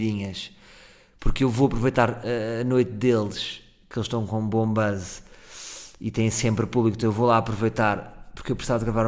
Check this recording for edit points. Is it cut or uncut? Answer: uncut